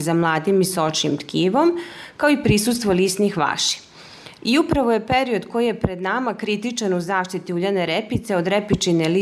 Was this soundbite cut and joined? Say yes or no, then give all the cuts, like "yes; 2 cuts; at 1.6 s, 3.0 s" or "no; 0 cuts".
yes; 1 cut; at 4.4 s